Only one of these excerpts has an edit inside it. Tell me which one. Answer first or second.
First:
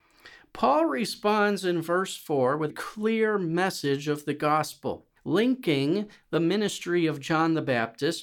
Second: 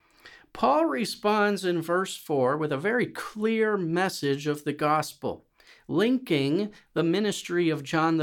first